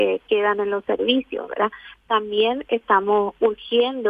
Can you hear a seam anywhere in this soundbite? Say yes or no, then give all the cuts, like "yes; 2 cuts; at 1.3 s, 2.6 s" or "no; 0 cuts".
no; 0 cuts